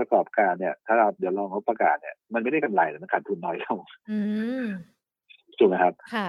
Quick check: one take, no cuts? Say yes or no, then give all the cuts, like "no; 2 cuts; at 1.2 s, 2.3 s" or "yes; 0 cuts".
no; 1 cut; at 2.2 s